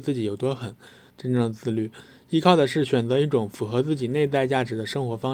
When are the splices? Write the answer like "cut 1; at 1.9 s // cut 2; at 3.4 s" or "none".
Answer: cut 1; at 1.1 s